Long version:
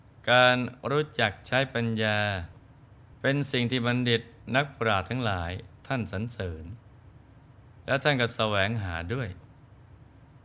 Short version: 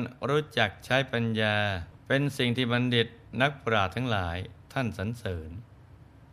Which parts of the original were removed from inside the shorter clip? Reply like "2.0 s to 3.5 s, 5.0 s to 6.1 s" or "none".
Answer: 2.6 s to 3.1 s